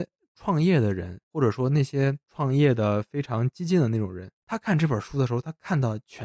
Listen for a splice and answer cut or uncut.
cut